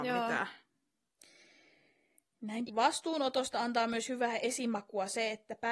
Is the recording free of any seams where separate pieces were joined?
no; 1 cut; at 2.7 s

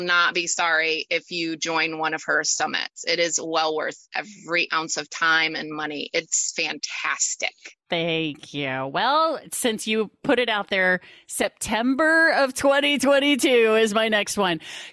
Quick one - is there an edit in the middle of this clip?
no; 0 cuts

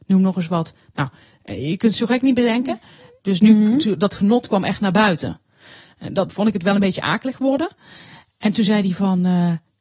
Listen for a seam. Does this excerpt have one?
yes; 2 cuts; at 3.2 s, 6.3 s

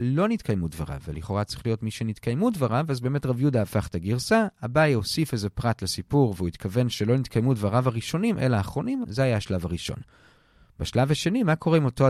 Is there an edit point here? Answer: yes; 1 cut; at 9.0 s

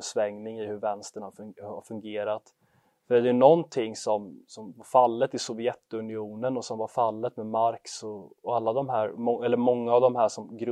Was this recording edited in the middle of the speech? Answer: no; 0 cuts

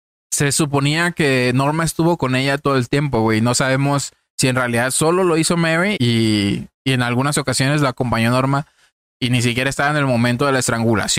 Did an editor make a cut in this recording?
yes; 1 cut; at 6.0 s

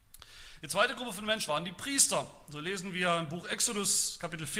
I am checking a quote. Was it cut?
yes; 1 cut; at 1.5 s

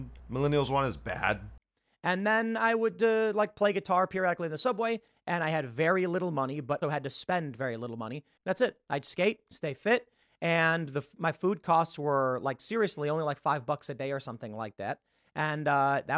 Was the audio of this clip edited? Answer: yes; 2 cuts; at 6.8 s, 8.4 s

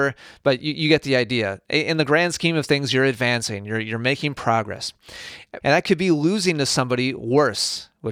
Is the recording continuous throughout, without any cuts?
no; 1 cut; at 5.6 s

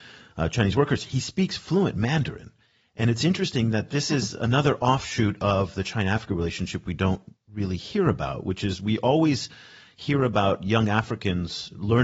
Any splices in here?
no; 0 cuts

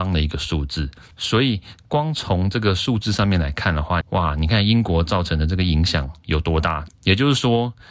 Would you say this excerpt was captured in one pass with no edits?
no; 3 cuts; at 1.1 s, 4.0 s, 6.9 s

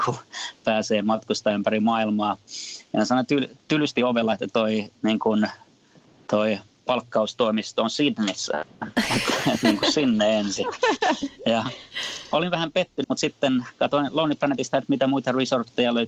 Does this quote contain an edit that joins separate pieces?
yes; 1 cut; at 13.0 s

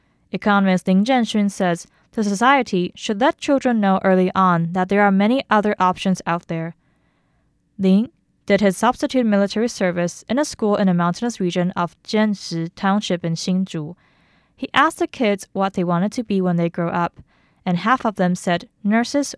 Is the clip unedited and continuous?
yes; 0 cuts

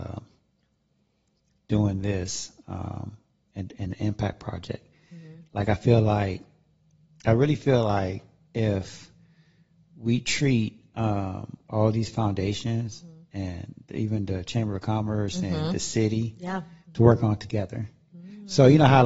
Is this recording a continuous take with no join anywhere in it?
no; 1 cut; at 16.9 s

